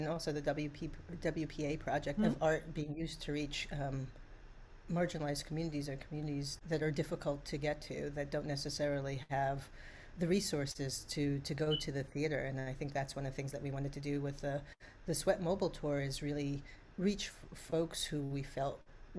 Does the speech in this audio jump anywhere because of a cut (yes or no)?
yes